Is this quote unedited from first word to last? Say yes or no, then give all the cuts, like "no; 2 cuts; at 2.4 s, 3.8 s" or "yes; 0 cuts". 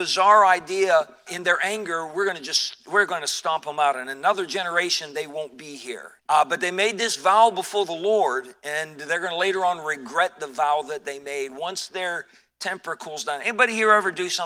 no; 2 cuts; at 1.3 s, 6.2 s